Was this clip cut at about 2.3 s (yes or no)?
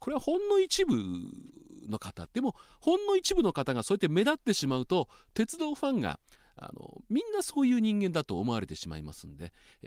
yes